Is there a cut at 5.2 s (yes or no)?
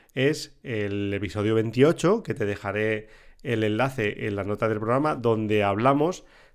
no